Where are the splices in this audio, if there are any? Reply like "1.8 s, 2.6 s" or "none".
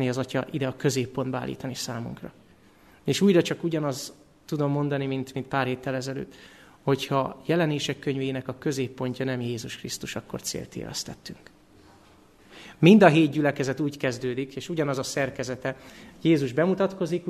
none